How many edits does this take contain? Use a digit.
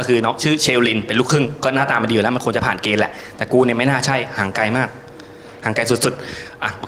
0